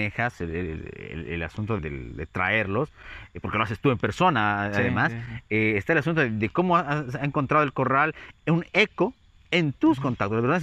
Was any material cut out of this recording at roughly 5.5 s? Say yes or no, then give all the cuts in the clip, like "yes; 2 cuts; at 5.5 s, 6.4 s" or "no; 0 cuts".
no; 1 cut; at 1.8 s